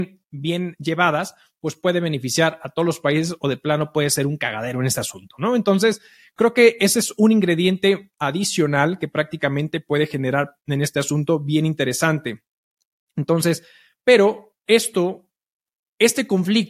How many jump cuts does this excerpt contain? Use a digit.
0